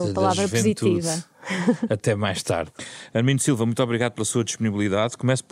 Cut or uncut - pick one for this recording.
uncut